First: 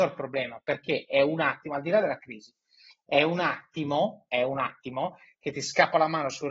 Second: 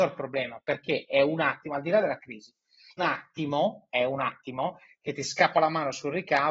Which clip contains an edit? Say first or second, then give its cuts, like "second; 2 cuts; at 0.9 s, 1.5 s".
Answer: second; 1 cut; at 3.0 s